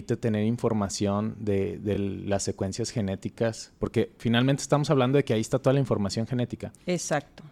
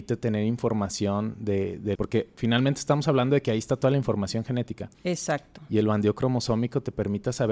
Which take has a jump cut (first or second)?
second